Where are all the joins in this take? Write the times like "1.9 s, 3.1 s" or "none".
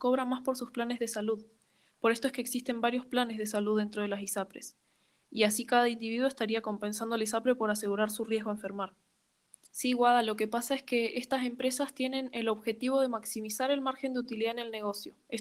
9.7 s